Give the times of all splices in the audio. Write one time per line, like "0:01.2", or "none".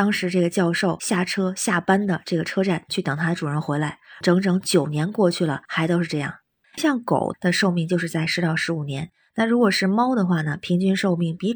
0:06.6